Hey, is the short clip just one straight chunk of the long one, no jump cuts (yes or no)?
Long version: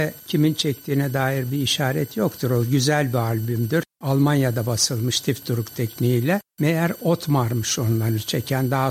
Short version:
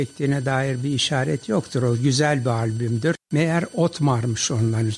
no